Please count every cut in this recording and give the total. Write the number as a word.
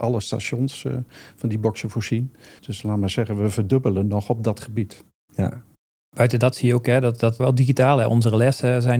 two